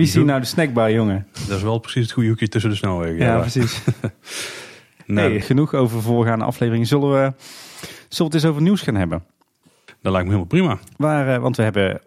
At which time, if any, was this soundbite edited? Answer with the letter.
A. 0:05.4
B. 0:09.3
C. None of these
A